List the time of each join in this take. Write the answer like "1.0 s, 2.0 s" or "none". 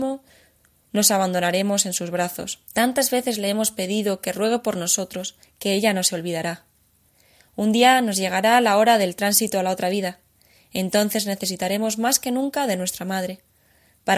2.6 s, 5.4 s